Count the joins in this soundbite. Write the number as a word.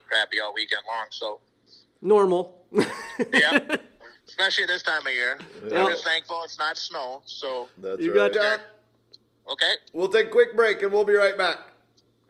one